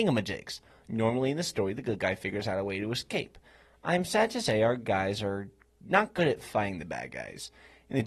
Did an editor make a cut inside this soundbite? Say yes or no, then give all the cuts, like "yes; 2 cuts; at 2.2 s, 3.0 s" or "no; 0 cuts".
no; 0 cuts